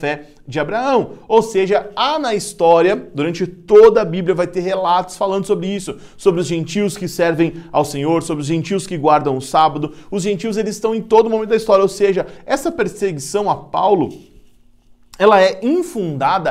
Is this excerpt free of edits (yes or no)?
yes